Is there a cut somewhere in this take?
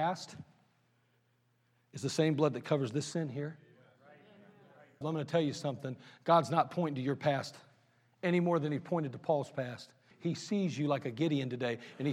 yes; 2 cuts; at 5.0 s, 10.1 s

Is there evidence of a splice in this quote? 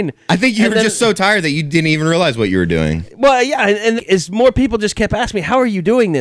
yes; 1 cut; at 4.0 s

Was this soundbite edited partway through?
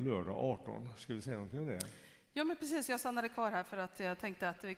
no; 0 cuts

